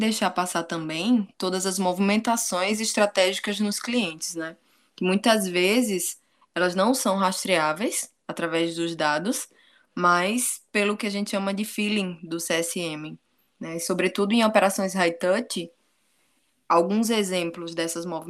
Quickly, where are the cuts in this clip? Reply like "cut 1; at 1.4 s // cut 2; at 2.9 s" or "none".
none

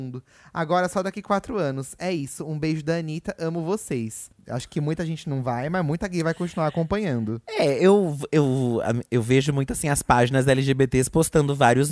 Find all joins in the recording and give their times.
cut 1; at 4.4 s

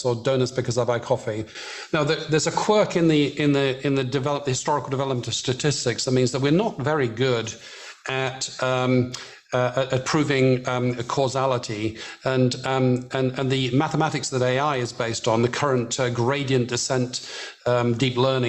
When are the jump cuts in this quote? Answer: none

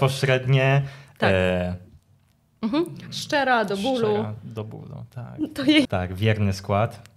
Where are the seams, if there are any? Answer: cut 1; at 5.9 s

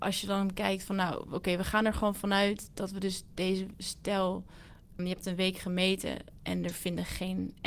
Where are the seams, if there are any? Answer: cut 1; at 5.0 s

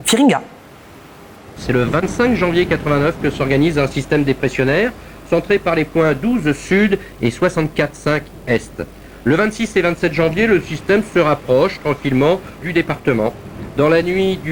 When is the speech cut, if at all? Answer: cut 1; at 1.6 s // cut 2; at 12.6 s

